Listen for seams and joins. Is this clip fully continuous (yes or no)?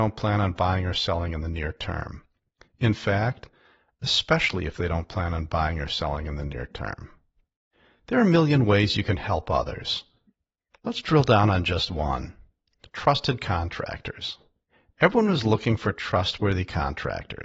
yes